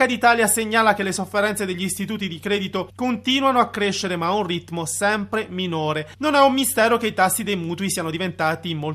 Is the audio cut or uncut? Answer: cut